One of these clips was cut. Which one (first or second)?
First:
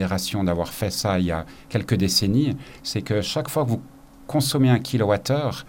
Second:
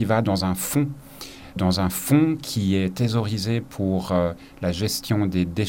second